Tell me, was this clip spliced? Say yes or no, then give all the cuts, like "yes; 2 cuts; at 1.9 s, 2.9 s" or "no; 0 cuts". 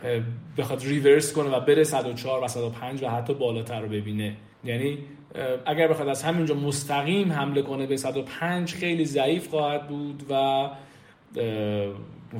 yes; 2 cuts; at 4.5 s, 8.7 s